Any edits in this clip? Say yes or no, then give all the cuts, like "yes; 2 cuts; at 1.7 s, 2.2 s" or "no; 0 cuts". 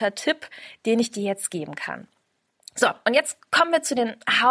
no; 0 cuts